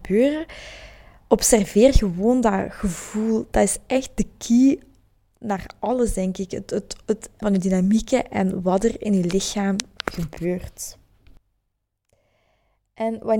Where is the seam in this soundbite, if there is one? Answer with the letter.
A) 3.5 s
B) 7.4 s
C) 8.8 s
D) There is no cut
B